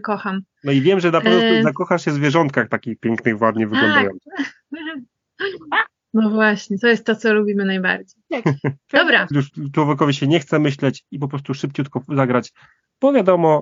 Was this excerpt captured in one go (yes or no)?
no